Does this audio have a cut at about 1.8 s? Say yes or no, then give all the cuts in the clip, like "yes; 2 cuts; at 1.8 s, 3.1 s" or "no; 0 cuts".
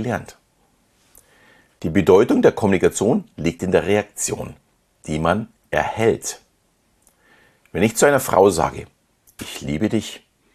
yes; 1 cut; at 1.8 s